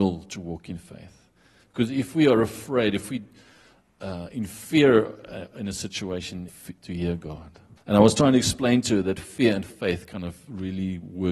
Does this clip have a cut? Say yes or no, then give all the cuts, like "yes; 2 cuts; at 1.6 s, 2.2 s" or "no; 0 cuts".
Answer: yes; 2 cuts; at 6.5 s, 7.8 s